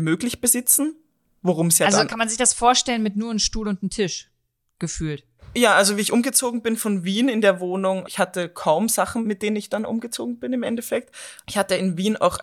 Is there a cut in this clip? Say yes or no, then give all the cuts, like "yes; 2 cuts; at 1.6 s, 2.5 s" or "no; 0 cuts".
yes; 1 cut; at 8.0 s